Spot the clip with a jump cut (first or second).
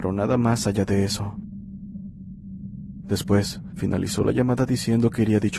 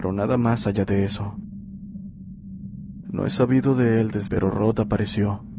second